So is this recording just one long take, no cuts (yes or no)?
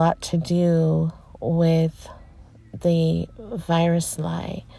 yes